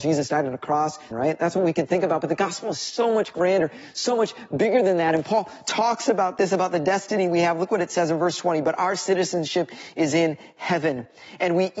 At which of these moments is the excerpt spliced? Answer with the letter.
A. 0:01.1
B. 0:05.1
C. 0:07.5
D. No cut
A